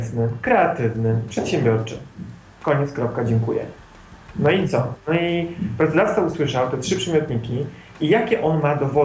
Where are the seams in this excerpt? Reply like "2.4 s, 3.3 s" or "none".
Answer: none